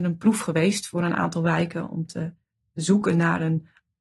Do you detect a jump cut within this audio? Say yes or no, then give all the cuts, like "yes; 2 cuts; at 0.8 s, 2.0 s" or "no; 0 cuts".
no; 0 cuts